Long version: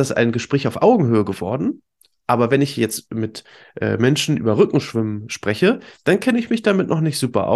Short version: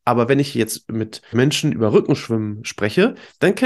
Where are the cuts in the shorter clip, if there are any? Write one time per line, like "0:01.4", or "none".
0:01.3